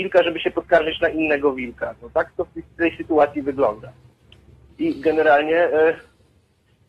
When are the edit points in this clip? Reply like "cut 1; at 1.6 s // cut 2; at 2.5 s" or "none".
none